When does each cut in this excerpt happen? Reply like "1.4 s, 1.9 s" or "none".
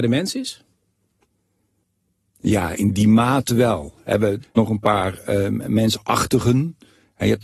4.4 s